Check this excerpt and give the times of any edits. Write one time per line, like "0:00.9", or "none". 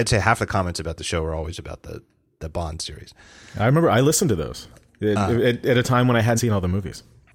0:06.4